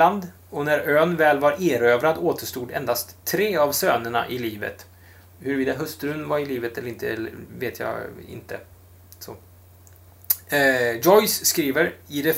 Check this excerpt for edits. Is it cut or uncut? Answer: uncut